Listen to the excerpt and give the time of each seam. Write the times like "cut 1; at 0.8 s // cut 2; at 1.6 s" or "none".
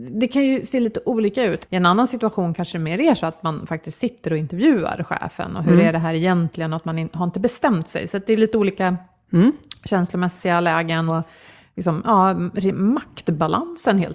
cut 1; at 1.6 s // cut 2; at 11.1 s